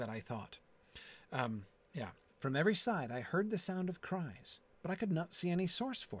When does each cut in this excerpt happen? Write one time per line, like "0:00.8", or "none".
0:02.3